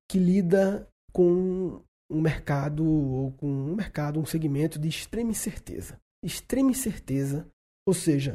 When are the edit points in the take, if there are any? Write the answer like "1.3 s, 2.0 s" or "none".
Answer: none